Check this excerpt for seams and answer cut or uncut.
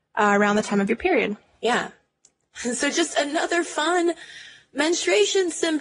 uncut